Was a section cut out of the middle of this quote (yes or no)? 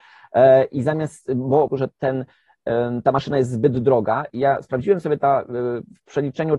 yes